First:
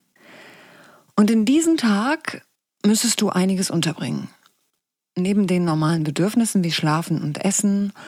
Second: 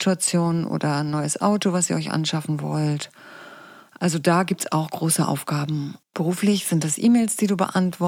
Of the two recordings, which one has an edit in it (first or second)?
second